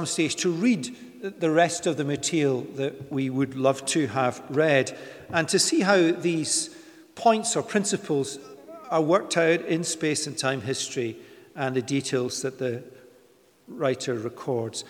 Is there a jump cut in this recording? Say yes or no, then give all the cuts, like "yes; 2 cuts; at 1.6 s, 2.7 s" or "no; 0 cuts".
no; 0 cuts